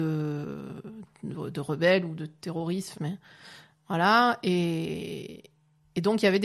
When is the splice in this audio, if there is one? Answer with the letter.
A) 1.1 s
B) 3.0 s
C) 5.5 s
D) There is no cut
B